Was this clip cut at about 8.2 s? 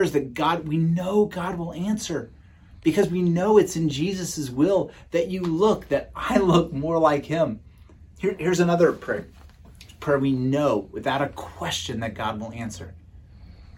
yes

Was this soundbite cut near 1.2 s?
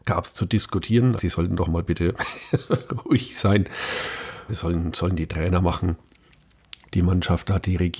yes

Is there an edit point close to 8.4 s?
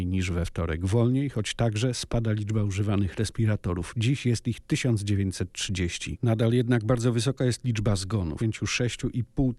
yes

